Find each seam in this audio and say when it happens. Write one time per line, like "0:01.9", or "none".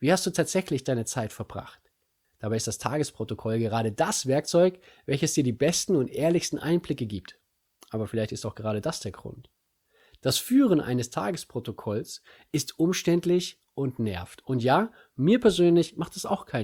0:02.2